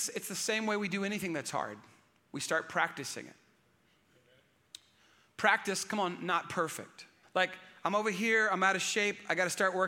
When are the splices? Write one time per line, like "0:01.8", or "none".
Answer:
0:07.2